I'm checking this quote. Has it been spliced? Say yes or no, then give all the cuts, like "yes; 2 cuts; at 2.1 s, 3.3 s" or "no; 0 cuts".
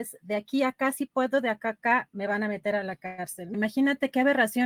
yes; 1 cut; at 3.5 s